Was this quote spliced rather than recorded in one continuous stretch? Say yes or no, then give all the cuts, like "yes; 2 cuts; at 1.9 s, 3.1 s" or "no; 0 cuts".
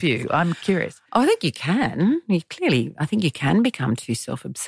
no; 0 cuts